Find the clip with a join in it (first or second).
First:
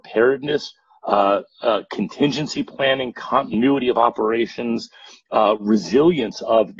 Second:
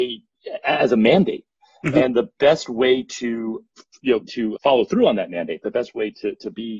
second